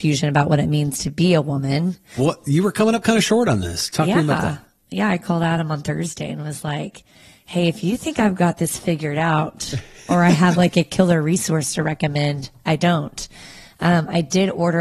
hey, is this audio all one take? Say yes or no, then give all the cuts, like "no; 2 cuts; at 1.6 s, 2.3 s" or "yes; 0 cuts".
no; 1 cut; at 2.2 s